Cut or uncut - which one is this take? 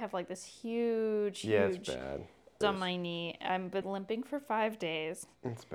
cut